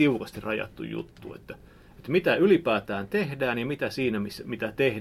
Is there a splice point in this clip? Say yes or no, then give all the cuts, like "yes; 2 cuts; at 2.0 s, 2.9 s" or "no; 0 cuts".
no; 0 cuts